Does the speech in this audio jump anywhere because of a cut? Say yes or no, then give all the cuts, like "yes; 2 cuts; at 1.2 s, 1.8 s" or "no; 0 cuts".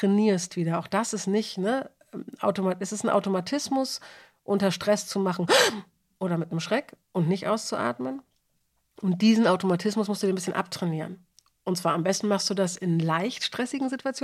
yes; 1 cut; at 7.0 s